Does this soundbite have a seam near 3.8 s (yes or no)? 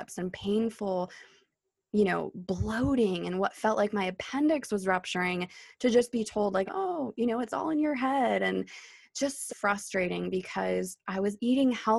no